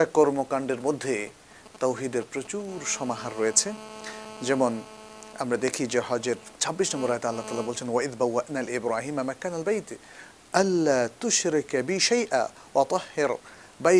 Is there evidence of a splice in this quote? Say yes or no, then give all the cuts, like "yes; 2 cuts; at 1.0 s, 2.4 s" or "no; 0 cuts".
yes; 1 cut; at 6.5 s